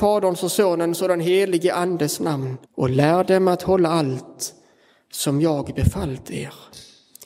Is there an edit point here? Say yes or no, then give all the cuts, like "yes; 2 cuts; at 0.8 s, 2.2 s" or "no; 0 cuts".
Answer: yes; 1 cut; at 2.6 s